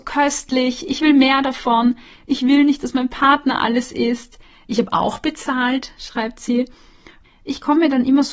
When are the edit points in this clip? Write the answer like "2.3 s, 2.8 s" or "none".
7.2 s